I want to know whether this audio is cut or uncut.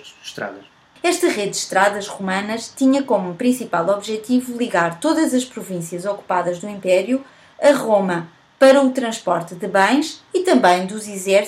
uncut